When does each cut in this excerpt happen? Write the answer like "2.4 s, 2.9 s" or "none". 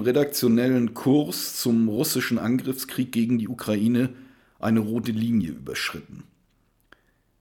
none